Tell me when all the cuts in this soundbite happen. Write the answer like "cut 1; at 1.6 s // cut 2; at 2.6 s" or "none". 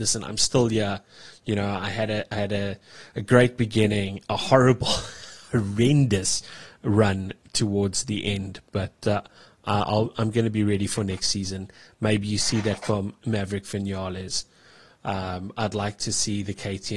none